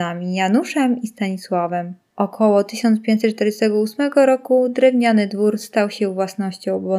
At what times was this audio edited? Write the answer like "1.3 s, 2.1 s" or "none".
none